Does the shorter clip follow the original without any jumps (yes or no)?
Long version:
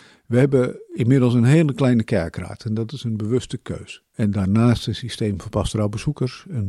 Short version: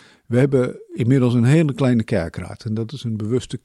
yes